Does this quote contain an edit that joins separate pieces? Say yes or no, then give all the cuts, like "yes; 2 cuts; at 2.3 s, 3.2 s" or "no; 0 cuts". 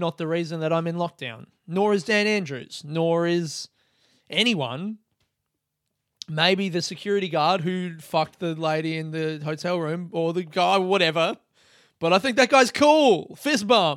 no; 0 cuts